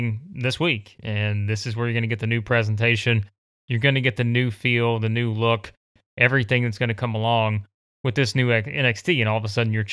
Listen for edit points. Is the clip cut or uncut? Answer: uncut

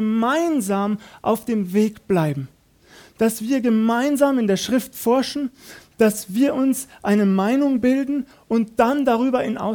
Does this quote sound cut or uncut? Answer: uncut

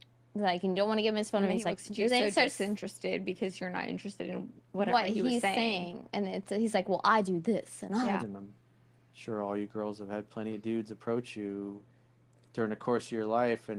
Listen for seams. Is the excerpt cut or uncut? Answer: cut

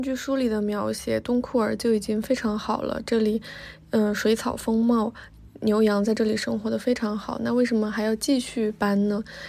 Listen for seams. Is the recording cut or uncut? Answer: uncut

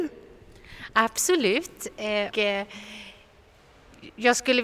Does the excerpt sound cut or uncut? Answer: cut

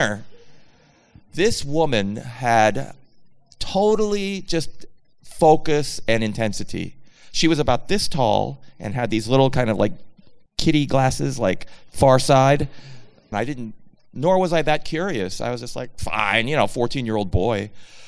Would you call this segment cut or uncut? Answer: cut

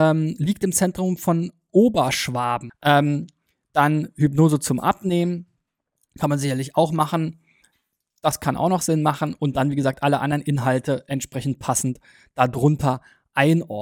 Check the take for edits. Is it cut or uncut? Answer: cut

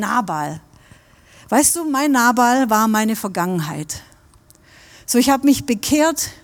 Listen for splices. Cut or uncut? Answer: uncut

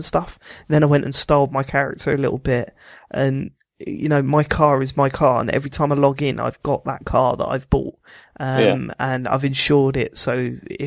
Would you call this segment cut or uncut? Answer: uncut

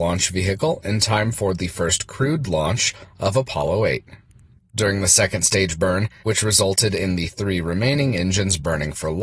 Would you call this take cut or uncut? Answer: cut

